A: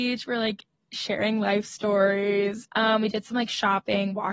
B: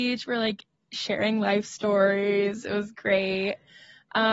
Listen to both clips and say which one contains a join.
A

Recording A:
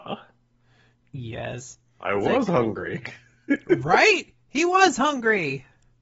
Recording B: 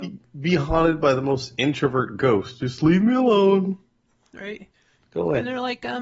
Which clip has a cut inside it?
B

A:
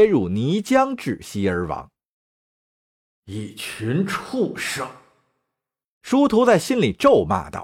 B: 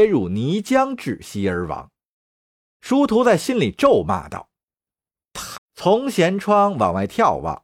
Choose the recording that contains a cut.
B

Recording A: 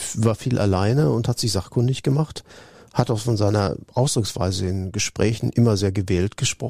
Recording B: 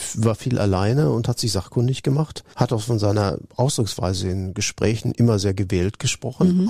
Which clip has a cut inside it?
B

